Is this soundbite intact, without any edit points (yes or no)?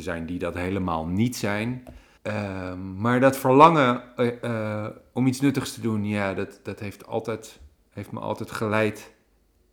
no